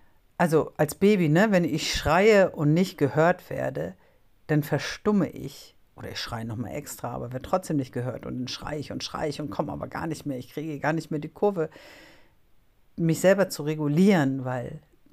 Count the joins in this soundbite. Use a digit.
0